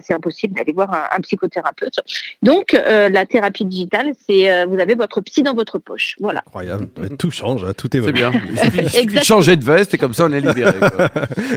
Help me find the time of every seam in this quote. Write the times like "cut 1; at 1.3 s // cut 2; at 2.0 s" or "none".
none